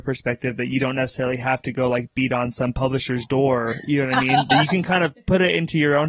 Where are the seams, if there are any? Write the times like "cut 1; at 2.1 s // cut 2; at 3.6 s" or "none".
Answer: none